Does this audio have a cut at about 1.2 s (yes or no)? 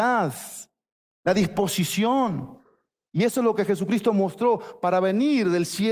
yes